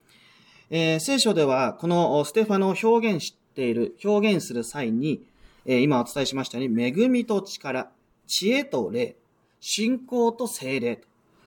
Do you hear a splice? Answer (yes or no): no